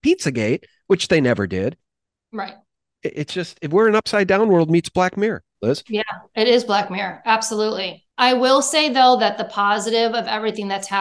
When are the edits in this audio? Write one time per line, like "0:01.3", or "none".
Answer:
0:08.1